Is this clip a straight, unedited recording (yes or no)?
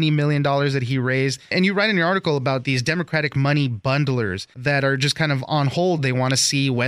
yes